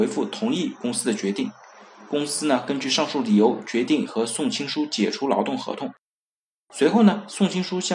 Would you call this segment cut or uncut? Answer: uncut